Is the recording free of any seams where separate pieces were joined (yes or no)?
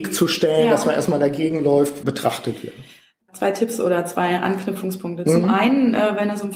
no